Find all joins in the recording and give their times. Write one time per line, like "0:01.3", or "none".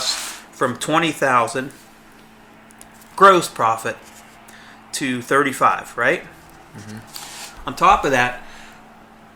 none